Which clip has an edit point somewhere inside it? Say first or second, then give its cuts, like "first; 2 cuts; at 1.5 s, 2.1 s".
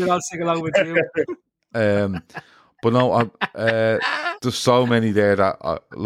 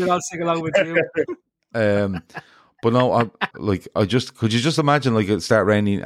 second; 1 cut; at 3.5 s